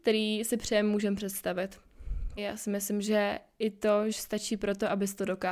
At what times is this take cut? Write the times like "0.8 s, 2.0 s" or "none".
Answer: 2.4 s, 4.1 s